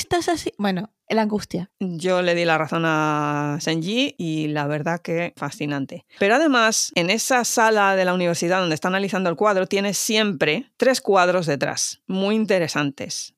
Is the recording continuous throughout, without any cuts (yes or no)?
no